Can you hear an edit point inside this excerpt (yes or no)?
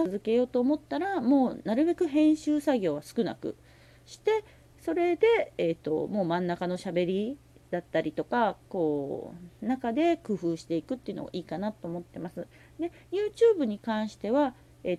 yes